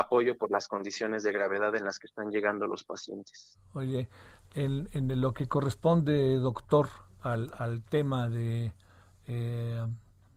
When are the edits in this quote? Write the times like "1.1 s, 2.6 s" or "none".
none